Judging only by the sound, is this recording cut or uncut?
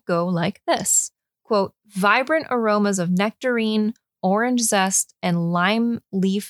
uncut